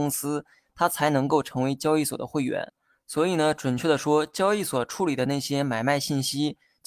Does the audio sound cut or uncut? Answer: uncut